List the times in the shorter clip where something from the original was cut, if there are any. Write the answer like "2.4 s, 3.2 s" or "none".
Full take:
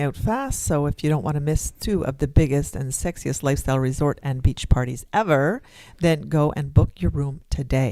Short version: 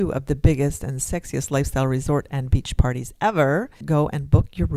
3.8 s